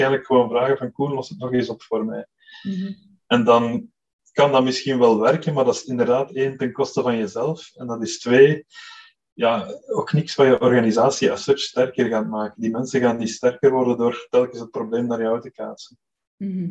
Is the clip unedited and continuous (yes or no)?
yes